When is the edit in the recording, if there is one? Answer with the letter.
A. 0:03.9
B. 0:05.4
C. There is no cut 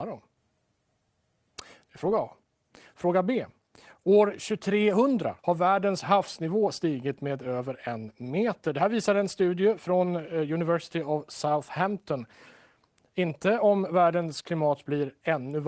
B